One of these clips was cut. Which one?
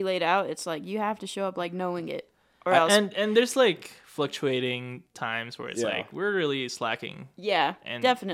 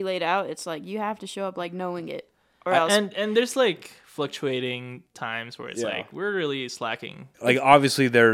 second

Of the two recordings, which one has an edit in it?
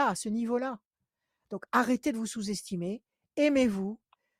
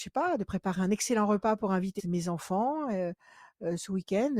second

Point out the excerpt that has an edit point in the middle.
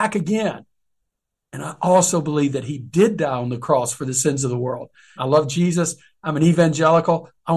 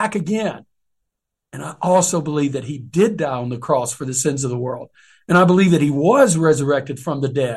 first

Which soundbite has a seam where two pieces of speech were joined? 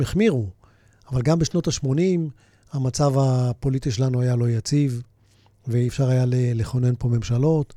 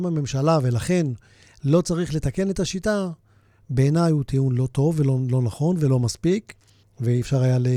second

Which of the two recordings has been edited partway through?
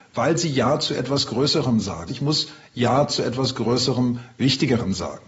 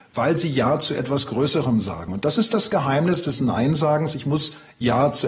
first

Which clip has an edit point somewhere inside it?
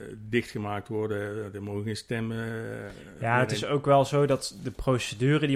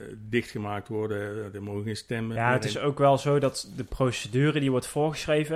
second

